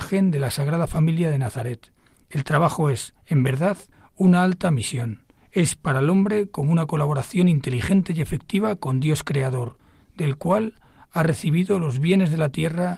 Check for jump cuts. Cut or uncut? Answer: uncut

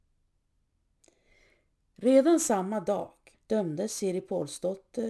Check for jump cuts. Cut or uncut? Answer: cut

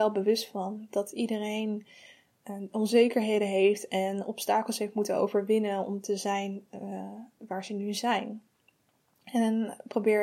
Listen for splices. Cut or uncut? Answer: uncut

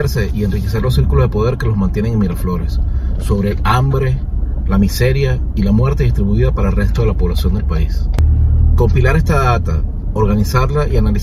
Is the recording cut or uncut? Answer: uncut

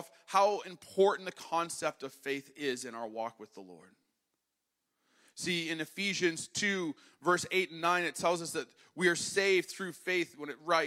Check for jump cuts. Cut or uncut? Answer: uncut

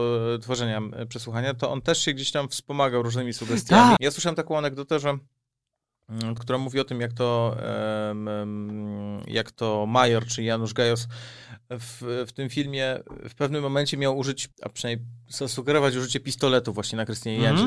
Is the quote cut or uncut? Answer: cut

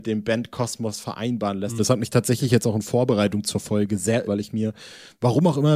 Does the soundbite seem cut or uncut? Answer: cut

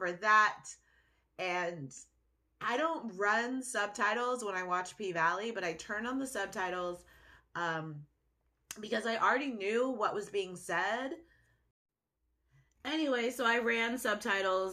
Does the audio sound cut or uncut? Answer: uncut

